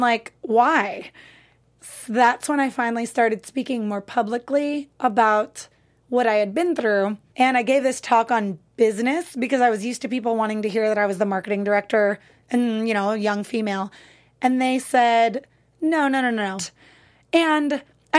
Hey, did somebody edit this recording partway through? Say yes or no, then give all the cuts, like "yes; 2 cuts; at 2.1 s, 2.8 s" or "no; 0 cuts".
yes; 2 cuts; at 7.3 s, 16.6 s